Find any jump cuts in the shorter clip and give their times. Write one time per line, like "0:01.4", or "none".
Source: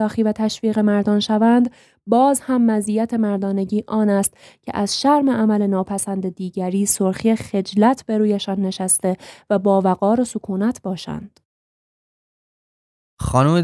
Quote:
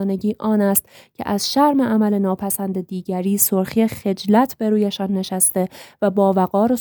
none